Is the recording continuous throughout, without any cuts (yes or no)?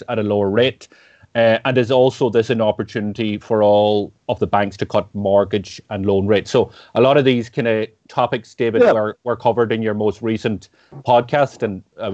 yes